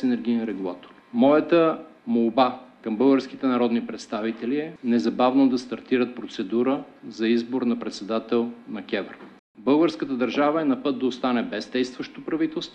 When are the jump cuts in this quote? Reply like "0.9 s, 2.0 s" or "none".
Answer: 9.4 s